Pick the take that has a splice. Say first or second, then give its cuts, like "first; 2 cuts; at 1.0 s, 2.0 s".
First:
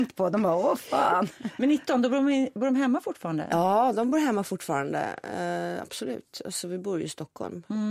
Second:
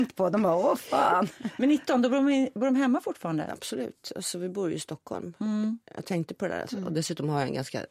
second; 2 cuts; at 3.5 s, 6.6 s